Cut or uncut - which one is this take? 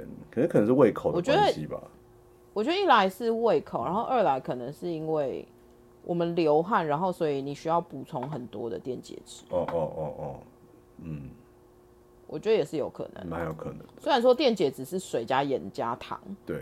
uncut